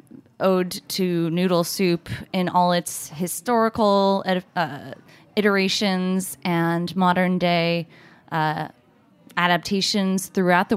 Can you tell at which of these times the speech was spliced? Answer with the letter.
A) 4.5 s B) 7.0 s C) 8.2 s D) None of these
D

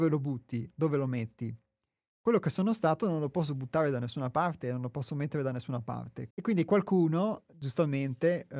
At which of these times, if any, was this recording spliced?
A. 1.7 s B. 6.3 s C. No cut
B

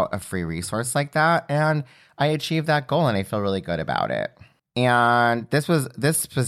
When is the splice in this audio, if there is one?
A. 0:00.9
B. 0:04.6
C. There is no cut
B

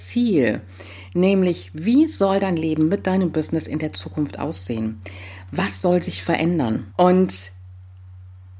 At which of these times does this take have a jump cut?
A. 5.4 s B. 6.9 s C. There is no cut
B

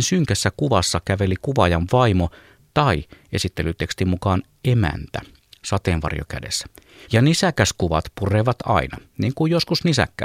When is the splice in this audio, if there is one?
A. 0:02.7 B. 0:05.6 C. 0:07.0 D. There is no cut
C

